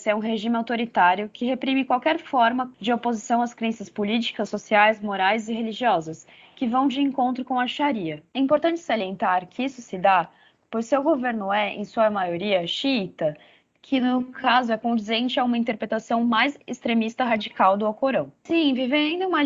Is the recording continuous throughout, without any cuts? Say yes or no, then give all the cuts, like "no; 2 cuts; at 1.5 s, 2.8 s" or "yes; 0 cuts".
yes; 0 cuts